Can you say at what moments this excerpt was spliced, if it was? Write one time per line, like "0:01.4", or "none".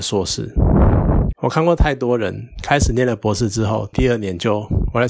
0:01.3
0:03.9